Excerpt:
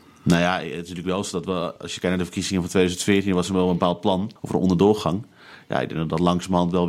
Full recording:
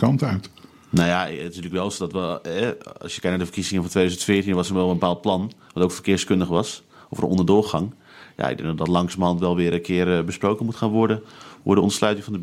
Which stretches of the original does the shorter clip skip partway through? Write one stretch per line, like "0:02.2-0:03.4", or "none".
0:02.4-0:03.0
0:05.6-0:07.0